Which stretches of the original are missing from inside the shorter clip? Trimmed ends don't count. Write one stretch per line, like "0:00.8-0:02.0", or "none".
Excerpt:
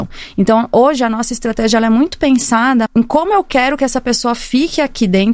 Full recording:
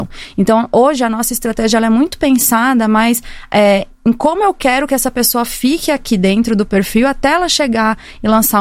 0:02.9-0:04.0